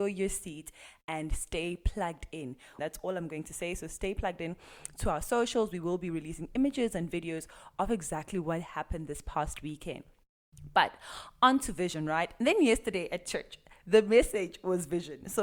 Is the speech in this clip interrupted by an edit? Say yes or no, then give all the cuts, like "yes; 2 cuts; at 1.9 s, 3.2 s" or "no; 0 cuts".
yes; 1 cut; at 2.8 s